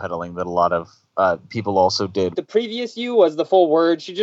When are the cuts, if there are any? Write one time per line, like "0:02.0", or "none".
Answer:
0:02.3

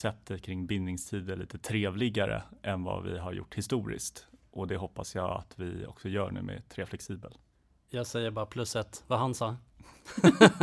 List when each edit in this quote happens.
none

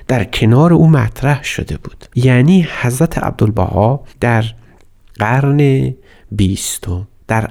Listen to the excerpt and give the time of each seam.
0:04.1

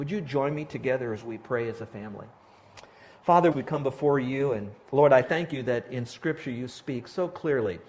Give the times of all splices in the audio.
0:03.5

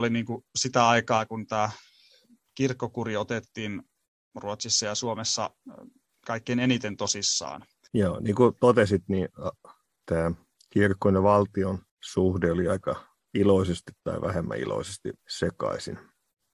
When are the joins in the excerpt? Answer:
0:07.9
0:11.9
0:15.2

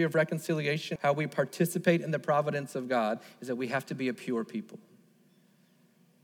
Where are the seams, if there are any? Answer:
0:01.0

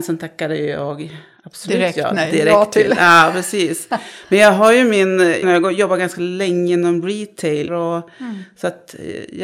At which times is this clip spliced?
0:05.4
0:07.7

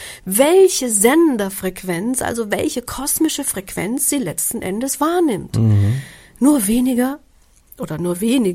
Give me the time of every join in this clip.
none

